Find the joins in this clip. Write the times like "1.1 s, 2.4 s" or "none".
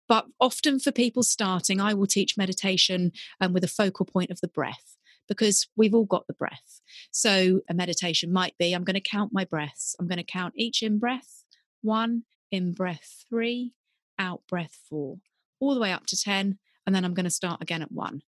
7.6 s, 12.3 s